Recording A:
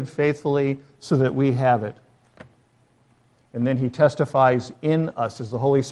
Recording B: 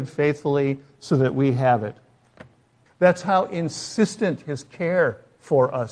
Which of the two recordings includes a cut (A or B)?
B